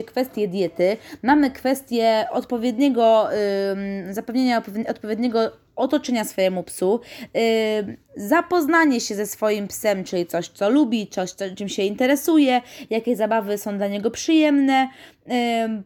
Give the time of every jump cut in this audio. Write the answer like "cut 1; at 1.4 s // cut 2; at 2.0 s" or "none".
cut 1; at 11.6 s